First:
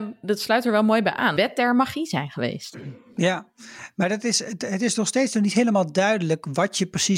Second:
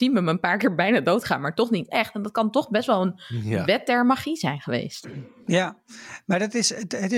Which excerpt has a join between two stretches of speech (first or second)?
first